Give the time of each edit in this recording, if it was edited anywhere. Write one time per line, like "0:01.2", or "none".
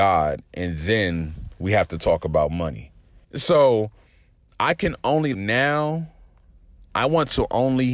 0:03.2
0:05.3